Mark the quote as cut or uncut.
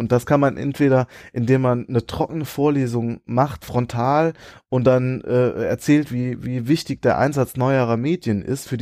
uncut